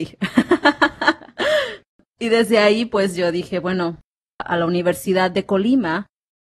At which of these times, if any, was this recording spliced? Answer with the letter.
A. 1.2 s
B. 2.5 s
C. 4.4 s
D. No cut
C